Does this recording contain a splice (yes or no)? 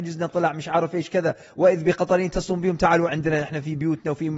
yes